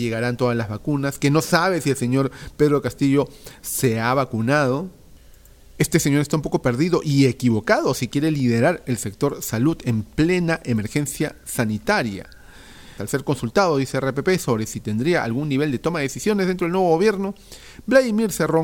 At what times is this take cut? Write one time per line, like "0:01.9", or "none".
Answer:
0:13.0